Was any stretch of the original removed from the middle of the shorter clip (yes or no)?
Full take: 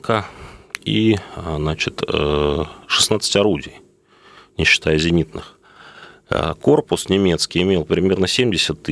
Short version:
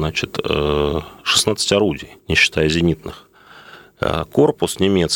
yes